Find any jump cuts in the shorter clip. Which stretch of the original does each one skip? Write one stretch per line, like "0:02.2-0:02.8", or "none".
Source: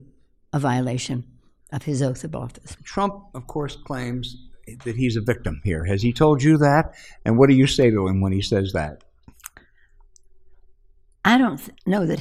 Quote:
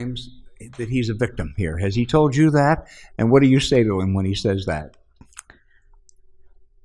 none